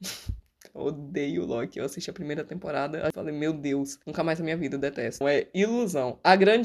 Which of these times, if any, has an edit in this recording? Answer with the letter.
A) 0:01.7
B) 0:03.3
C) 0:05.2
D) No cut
C